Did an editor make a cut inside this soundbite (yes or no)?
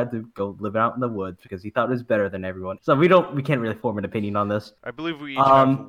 yes